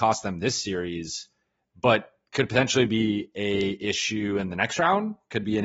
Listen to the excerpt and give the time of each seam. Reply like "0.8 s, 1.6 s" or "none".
none